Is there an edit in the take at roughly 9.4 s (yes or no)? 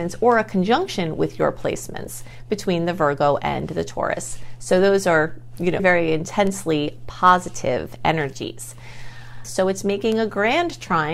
yes